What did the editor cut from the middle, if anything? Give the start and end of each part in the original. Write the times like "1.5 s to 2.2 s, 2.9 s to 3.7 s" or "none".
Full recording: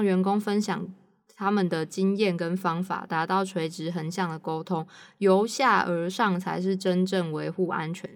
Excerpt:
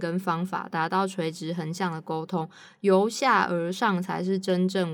none